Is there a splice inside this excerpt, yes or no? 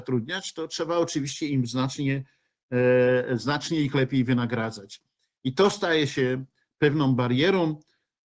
no